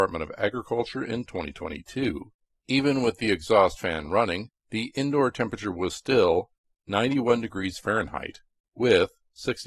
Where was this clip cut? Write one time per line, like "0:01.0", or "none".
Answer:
0:02.5
0:04.6